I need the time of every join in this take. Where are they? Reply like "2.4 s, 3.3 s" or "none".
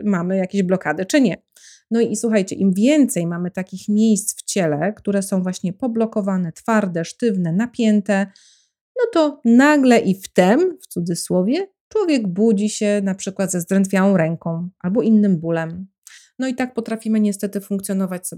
none